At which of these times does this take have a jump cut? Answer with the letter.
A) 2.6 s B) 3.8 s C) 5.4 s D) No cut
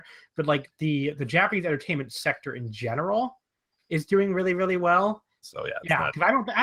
C